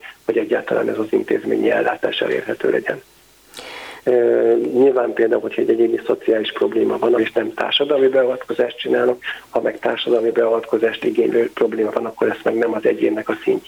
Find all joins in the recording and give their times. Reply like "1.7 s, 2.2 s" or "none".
4.0 s, 7.2 s